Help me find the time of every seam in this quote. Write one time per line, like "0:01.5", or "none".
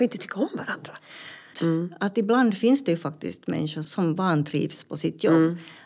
0:01.5
0:03.8